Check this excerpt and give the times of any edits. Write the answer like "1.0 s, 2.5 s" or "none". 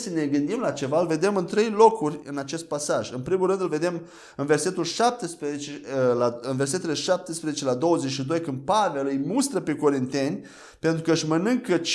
none